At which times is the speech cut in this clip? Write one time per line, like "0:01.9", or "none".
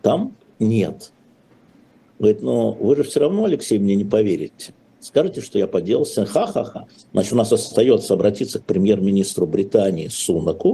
0:02.1
0:07.1